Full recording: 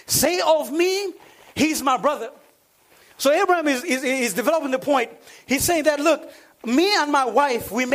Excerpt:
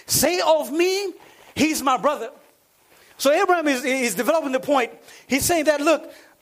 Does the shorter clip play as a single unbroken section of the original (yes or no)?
no